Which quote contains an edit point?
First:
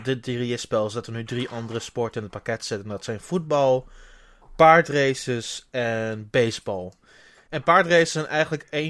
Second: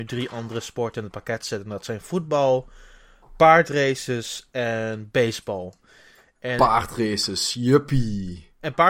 first; 1 cut; at 7.5 s

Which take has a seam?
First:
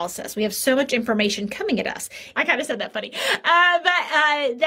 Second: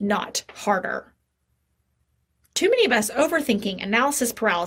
first; 1 cut; at 2.3 s

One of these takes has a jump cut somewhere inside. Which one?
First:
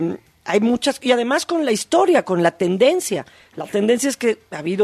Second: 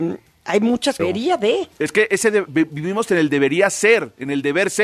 second; 1 cut; at 1.0 s

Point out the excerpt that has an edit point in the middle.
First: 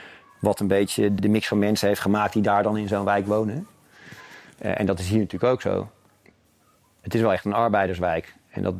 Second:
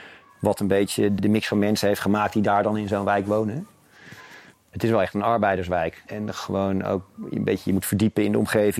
second; 2 cuts; at 4.5 s, 6.1 s

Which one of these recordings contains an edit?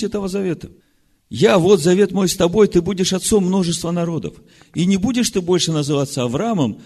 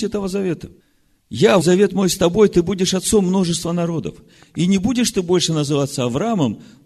second; 1 cut; at 1.6 s

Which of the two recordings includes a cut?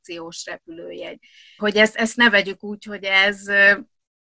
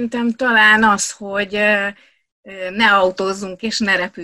first; 1 cut; at 1.6 s

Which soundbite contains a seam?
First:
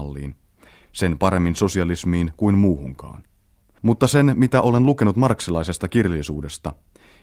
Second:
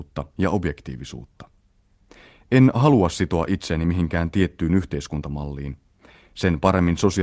first; 1 cut; at 3.8 s

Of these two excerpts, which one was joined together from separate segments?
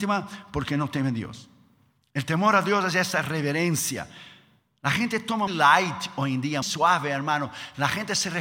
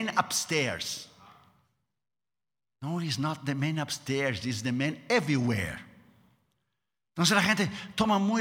first; 2 cuts; at 5.5 s, 6.6 s

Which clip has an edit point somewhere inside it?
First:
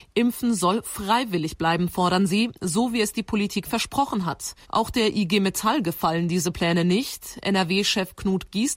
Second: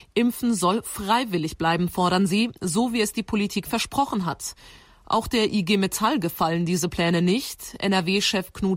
first; 1 cut; at 4.6 s

